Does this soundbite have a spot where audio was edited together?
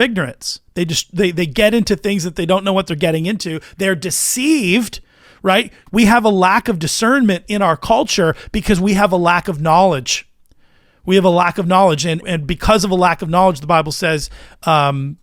yes; 2 cuts; at 5.9 s, 12.2 s

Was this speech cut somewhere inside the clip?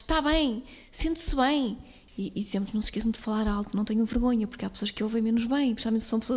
no; 0 cuts

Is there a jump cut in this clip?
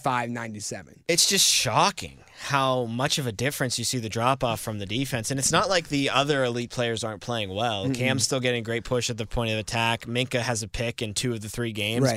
no; 0 cuts

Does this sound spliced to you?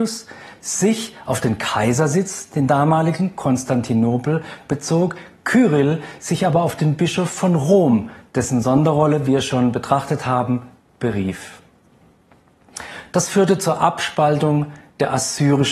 no; 0 cuts

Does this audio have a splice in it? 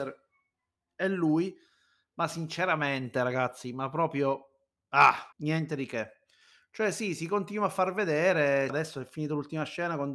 yes; 2 cuts; at 5.3 s, 8.7 s

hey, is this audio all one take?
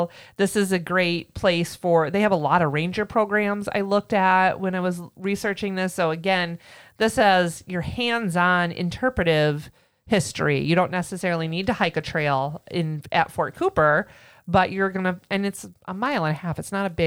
yes; 0 cuts

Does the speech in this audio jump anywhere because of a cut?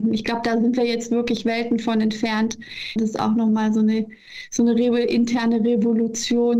yes; 1 cut; at 3.0 s

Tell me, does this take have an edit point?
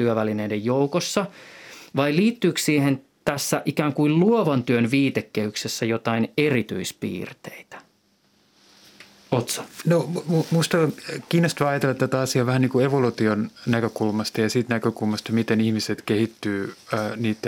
no; 0 cuts

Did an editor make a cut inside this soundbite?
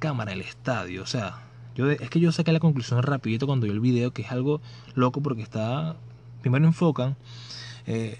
no; 0 cuts

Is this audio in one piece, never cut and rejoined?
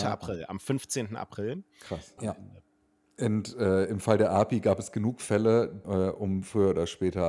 no; 2 cuts; at 2.2 s, 5.8 s

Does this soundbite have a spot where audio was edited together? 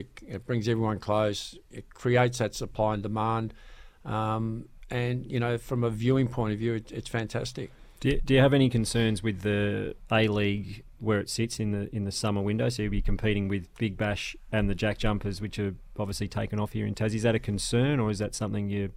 no; 0 cuts

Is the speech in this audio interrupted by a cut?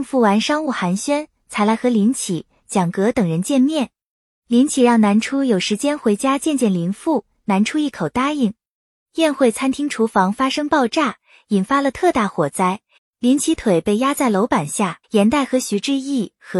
yes; 2 cuts; at 13.0 s, 15.0 s

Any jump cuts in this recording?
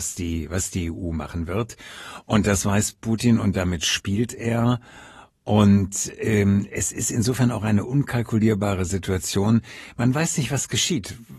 no; 0 cuts

